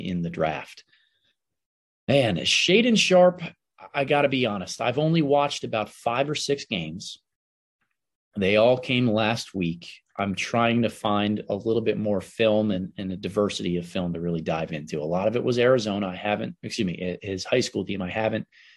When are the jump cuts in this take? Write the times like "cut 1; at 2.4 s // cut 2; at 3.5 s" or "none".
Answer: none